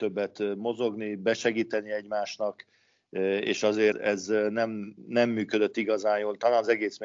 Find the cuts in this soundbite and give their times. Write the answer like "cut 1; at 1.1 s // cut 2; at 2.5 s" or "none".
cut 1; at 3.9 s